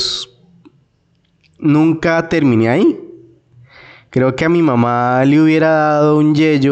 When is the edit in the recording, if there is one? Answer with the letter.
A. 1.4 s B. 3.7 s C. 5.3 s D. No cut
D